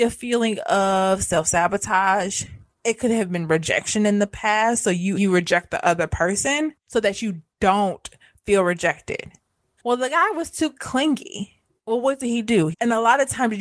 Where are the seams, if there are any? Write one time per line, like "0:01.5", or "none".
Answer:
0:05.1
0:09.8
0:12.7